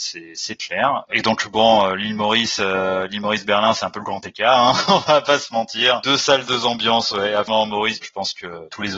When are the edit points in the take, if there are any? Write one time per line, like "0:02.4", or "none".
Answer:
0:01.1
0:08.0